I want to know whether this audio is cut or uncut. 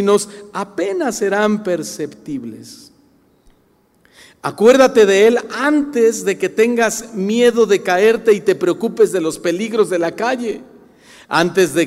uncut